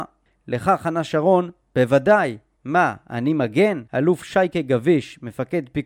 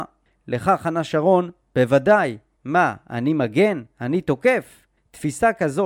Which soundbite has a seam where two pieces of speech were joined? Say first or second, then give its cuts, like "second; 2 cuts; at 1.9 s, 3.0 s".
first; 1 cut; at 3.9 s